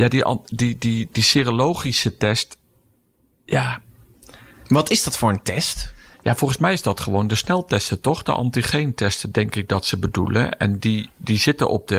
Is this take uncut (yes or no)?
yes